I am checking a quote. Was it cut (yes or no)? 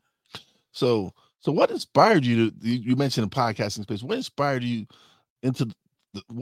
no